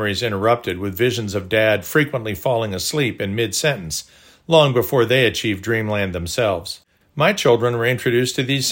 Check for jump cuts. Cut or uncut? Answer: cut